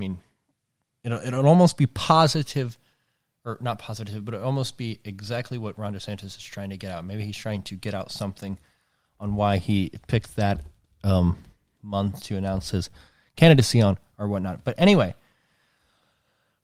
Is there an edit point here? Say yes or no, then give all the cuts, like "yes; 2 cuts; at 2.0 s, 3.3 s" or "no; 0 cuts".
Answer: no; 0 cuts